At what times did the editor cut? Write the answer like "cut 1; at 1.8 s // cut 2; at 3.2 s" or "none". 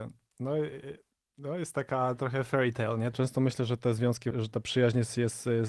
cut 1; at 3.1 s // cut 2; at 4.3 s